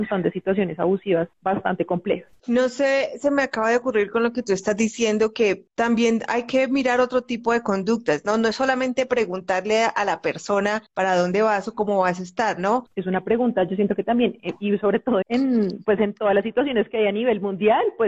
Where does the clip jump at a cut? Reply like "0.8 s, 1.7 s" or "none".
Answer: 12.9 s, 15.2 s